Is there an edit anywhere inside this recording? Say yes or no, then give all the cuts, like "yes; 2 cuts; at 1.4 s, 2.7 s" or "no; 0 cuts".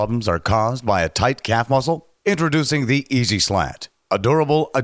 yes; 1 cut; at 2.2 s